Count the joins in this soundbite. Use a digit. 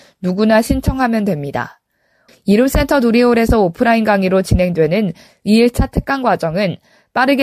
1